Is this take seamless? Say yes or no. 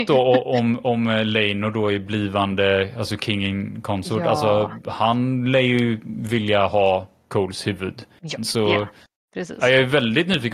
no